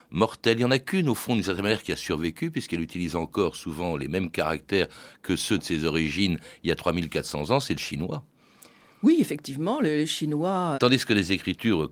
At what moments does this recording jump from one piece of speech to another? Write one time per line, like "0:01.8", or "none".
0:10.7